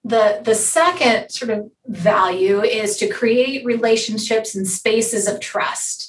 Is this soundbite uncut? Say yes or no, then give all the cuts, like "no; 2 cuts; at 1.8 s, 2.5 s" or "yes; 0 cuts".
no; 1 cut; at 1.7 s